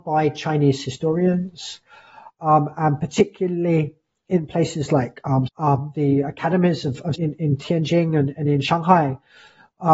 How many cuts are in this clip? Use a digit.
2